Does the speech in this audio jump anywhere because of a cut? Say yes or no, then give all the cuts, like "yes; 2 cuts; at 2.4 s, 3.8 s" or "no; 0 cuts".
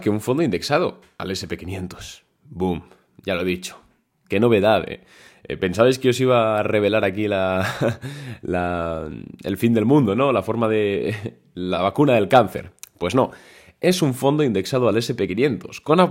no; 0 cuts